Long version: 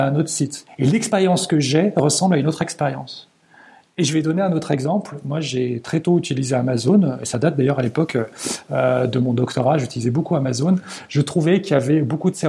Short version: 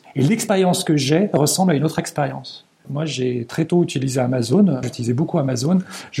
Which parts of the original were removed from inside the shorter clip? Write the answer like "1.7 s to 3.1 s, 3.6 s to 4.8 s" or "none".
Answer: 3.5 s to 5.2 s, 7.2 s to 9.8 s